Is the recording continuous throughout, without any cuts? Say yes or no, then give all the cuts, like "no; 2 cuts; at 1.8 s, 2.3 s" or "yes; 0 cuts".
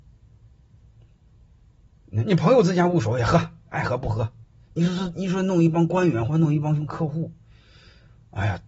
yes; 0 cuts